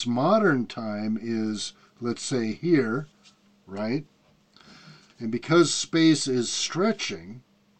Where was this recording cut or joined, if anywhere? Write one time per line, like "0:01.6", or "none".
0:05.1